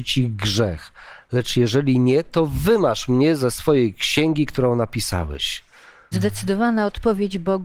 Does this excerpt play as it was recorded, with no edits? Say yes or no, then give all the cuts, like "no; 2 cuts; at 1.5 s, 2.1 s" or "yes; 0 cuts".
no; 1 cut; at 6.1 s